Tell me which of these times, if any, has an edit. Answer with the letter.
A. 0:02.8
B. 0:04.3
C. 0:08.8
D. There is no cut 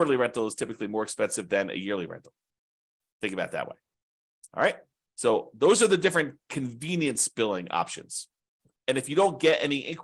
C